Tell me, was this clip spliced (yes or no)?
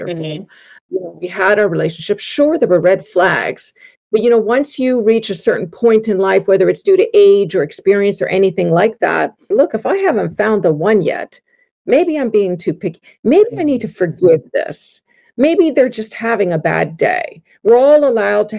yes